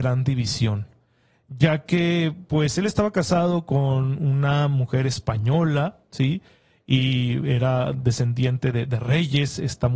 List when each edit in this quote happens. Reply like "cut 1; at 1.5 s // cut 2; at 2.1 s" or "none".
none